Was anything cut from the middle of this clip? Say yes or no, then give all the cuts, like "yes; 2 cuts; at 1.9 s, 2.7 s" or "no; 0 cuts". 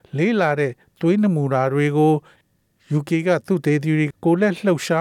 yes; 1 cut; at 4.1 s